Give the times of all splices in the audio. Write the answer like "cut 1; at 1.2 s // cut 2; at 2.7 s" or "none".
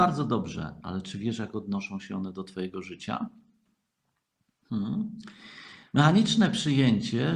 none